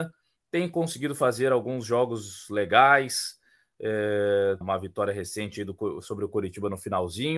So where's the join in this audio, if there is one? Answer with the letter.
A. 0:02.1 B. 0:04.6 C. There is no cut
B